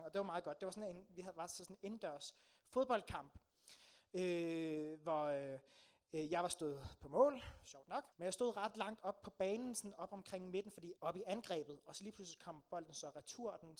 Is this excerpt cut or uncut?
cut